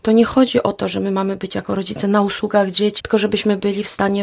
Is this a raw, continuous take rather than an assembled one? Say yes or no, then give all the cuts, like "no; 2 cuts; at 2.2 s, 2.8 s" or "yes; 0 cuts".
no; 1 cut; at 3.0 s